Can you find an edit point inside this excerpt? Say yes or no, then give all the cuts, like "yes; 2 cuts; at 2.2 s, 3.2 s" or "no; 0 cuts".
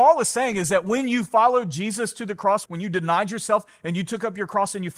yes; 1 cut; at 2.7 s